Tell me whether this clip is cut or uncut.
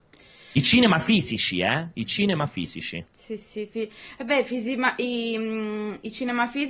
uncut